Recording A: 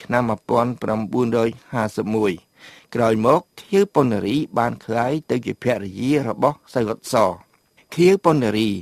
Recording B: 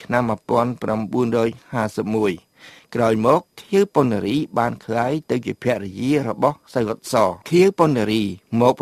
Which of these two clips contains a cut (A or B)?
B